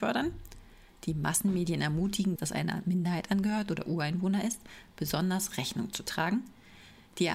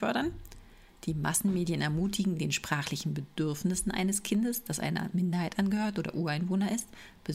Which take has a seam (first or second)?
first